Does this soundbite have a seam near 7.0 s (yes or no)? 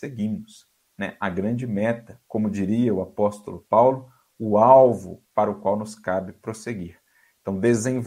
no